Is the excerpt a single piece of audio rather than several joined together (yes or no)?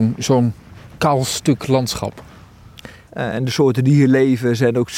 no